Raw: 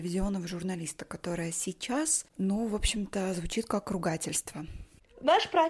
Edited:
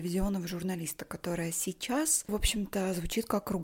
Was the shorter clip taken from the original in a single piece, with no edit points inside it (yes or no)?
no